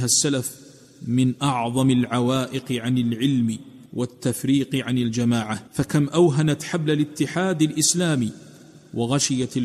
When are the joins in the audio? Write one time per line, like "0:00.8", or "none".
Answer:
0:03.9
0:05.7